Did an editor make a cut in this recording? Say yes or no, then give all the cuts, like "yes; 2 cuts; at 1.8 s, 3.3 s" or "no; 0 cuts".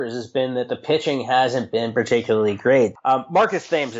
yes; 1 cut; at 3.0 s